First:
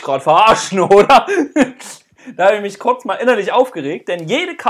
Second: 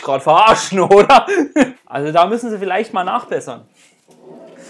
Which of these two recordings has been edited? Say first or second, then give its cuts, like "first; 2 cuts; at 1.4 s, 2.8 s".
second; 1 cut; at 1.7 s